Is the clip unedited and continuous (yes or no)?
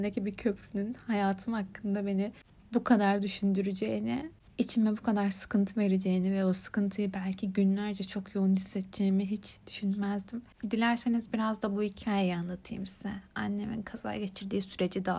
yes